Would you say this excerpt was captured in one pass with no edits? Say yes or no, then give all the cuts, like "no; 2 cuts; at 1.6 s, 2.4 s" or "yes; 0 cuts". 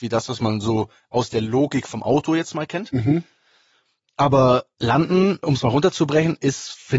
no; 1 cut; at 5.4 s